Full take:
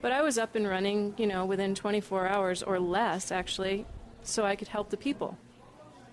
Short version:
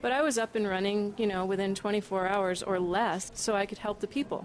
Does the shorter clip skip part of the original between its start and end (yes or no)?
yes